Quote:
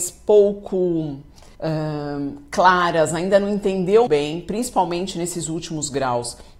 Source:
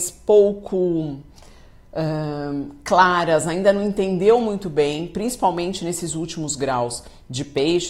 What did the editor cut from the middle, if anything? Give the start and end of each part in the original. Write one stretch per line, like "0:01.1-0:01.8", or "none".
0:01.5-0:01.9
0:04.4-0:04.7